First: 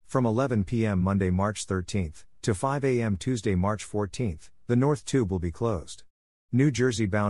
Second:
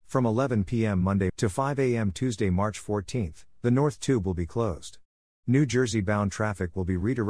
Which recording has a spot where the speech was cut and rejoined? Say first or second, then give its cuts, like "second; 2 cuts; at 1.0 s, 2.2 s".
second; 1 cut; at 1.3 s